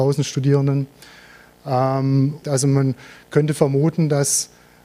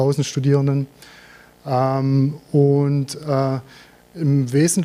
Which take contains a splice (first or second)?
first